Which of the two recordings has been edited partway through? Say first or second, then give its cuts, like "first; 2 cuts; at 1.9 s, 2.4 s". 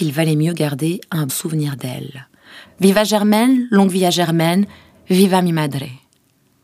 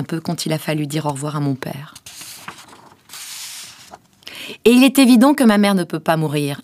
first; 2 cuts; at 1.3 s, 2.6 s